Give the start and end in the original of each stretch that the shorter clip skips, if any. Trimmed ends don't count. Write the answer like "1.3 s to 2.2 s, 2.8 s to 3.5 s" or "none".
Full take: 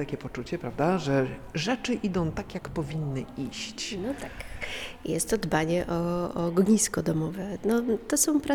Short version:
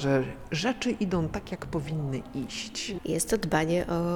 4.0 s to 5.0 s